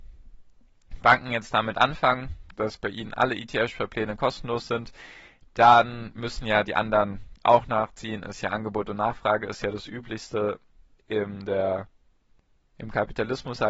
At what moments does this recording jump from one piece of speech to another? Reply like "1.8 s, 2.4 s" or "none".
none